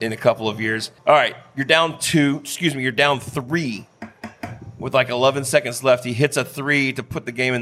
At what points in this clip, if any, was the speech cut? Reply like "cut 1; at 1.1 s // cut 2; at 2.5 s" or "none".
cut 1; at 1.0 s